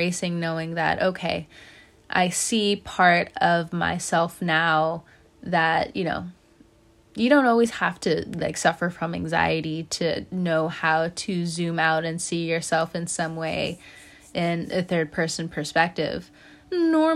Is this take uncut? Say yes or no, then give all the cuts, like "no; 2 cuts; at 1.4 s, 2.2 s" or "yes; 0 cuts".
yes; 0 cuts